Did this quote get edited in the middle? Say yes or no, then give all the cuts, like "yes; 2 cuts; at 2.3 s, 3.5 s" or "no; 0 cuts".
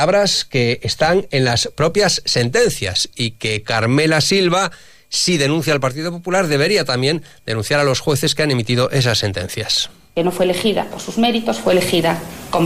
no; 0 cuts